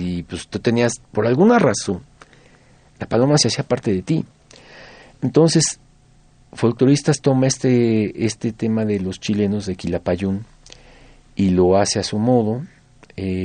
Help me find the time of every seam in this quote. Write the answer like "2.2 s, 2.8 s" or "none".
1.0 s